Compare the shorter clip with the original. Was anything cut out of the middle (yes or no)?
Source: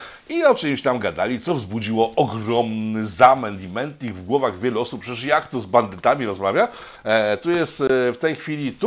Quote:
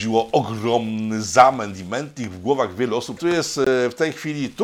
yes